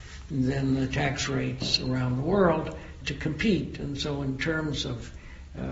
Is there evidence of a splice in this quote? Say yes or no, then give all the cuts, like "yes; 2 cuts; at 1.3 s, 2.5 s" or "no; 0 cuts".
yes; 1 cut; at 3.0 s